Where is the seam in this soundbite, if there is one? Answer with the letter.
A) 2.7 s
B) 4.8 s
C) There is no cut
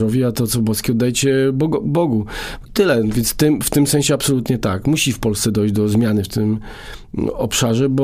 A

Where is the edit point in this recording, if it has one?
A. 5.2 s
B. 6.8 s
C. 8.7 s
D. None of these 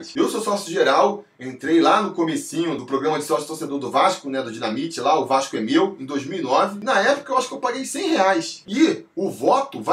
C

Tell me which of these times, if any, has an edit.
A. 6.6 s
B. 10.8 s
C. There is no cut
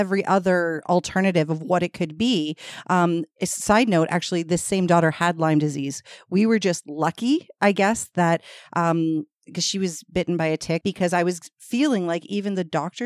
B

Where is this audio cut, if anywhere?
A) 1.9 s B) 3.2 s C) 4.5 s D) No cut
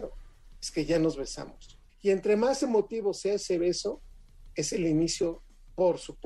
A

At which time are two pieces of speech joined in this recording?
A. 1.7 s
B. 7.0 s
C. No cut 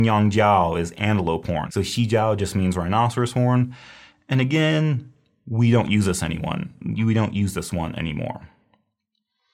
A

